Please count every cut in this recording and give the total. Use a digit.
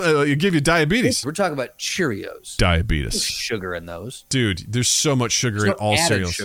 1